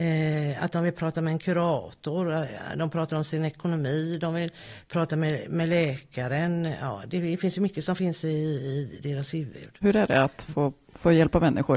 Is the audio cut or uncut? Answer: uncut